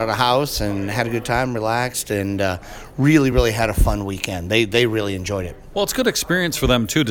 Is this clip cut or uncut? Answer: uncut